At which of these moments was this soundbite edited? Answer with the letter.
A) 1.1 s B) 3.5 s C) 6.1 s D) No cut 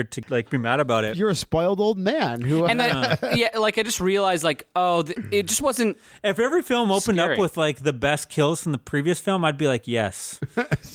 B